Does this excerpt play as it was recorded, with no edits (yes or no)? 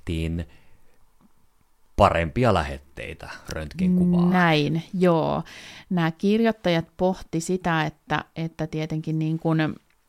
yes